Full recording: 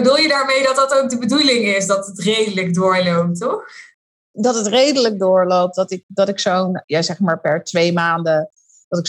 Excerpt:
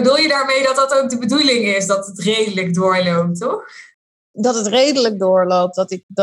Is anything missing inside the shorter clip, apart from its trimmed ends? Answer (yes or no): no